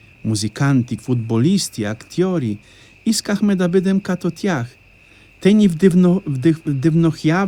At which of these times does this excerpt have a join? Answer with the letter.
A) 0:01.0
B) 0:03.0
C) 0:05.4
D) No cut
A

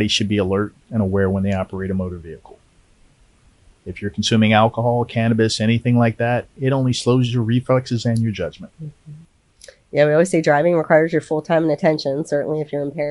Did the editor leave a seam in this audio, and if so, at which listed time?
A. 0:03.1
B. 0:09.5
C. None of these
C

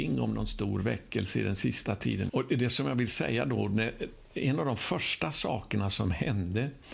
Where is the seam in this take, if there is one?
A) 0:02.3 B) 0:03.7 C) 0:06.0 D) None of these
A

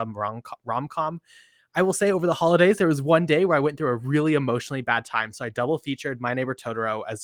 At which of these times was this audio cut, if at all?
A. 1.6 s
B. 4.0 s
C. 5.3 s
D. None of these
A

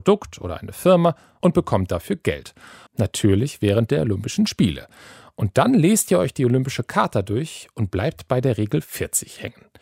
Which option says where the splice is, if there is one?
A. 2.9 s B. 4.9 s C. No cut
A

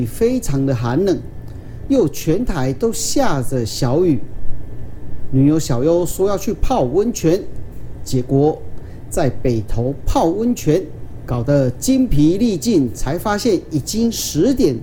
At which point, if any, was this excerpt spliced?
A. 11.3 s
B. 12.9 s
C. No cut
A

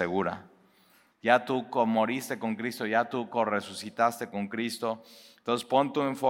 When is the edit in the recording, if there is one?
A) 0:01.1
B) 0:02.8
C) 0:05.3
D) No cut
A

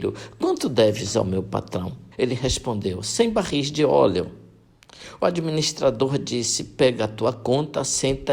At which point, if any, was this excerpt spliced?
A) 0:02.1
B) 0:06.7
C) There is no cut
A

